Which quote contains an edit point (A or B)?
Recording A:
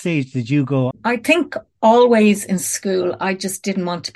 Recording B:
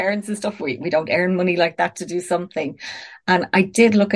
A